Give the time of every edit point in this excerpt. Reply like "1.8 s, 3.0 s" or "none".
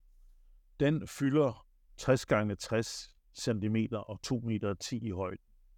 none